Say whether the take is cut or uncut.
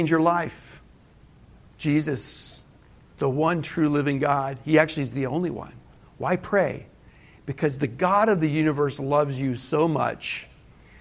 uncut